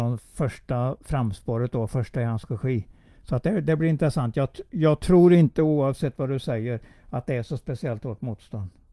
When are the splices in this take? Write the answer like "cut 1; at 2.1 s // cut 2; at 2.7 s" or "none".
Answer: none